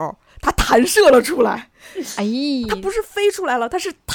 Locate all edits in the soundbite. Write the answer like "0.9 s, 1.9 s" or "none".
none